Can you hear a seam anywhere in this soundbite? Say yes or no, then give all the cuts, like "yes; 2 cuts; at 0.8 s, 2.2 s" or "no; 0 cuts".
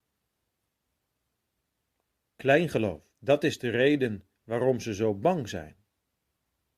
yes; 2 cuts; at 3.1 s, 4.4 s